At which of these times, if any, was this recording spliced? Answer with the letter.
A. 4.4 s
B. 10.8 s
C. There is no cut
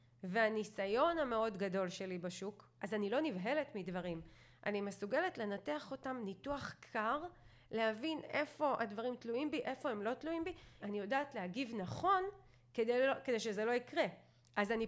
B